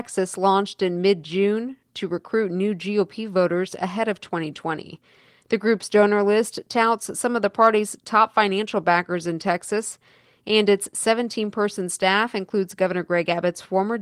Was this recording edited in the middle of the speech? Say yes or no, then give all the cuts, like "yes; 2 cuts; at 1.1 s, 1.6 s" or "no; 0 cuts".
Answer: no; 0 cuts